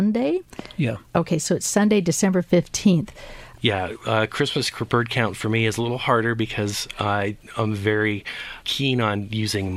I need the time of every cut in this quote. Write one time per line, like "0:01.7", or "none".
0:03.6
0:08.6